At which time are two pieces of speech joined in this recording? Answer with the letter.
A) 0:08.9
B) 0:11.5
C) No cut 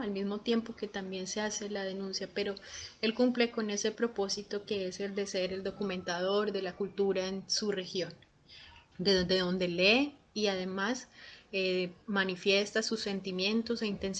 A